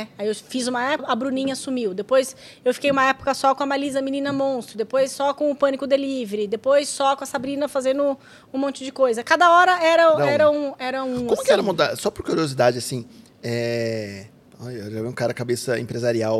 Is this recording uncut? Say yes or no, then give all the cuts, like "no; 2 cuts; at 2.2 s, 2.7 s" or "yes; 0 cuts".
no; 1 cut; at 1.0 s